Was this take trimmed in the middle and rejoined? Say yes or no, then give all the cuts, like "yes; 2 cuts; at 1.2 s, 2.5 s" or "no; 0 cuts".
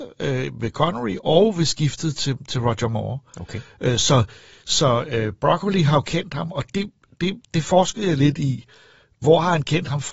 no; 0 cuts